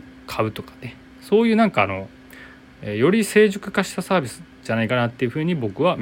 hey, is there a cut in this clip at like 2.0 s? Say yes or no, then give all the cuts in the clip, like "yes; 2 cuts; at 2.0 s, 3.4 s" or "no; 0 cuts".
no; 0 cuts